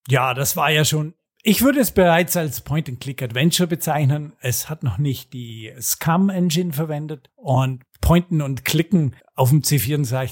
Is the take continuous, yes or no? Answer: yes